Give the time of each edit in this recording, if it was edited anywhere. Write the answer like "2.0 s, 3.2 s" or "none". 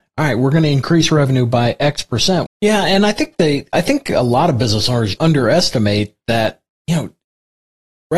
2.5 s, 5.2 s

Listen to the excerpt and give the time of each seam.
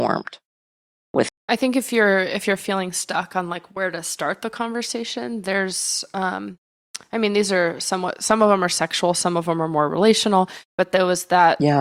1.3 s

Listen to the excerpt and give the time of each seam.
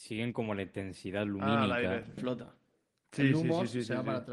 2.2 s

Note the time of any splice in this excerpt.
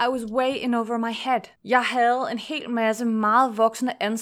1.6 s

